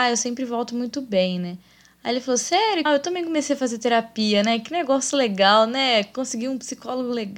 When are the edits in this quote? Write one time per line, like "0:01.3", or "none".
0:02.9